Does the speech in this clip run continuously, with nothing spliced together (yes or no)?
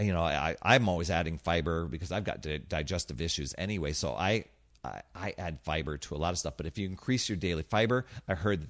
yes